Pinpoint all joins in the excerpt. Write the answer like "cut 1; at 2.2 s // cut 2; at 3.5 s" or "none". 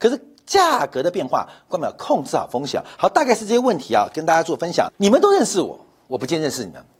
cut 1; at 4.9 s